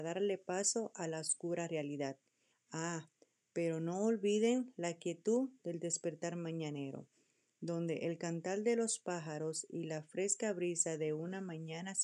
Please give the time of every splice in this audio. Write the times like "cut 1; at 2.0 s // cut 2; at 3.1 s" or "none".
cut 1; at 2.5 s